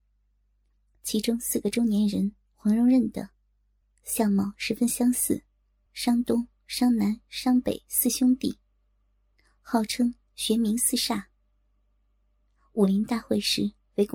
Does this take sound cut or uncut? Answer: cut